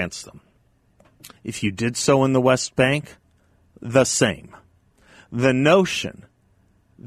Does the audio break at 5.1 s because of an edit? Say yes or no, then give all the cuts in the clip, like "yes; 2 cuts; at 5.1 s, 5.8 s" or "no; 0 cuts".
no; 1 cut; at 1.4 s